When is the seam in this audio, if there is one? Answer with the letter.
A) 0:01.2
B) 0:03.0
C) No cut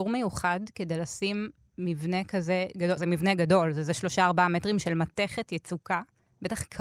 B